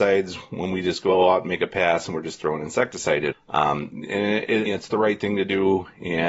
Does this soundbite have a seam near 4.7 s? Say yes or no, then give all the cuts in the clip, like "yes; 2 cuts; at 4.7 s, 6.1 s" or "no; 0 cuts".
yes; 2 cuts; at 3.3 s, 4.7 s